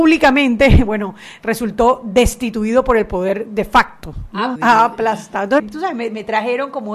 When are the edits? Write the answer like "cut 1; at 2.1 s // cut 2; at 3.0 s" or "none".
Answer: cut 1; at 4.6 s // cut 2; at 5.6 s